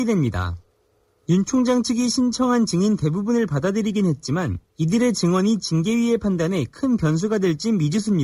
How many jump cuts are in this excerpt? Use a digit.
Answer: 1